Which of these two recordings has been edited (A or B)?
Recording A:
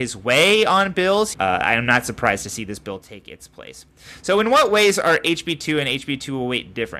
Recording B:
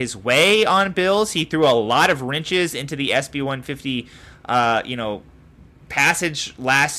A